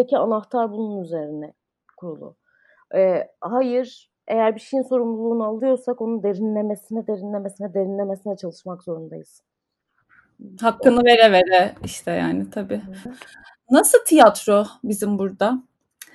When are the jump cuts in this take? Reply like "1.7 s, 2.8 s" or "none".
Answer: 13.1 s